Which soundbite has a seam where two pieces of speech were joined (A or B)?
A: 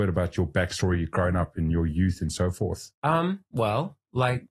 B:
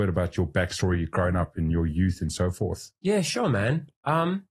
A